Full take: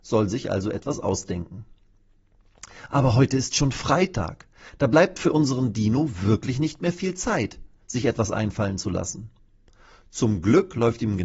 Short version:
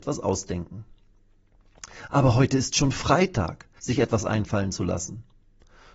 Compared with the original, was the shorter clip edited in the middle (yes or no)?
yes